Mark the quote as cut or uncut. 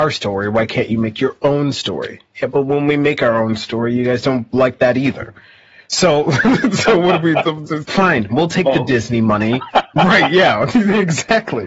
cut